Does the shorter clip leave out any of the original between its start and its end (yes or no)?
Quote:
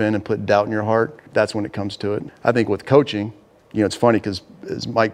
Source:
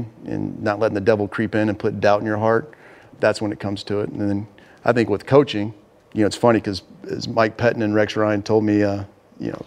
yes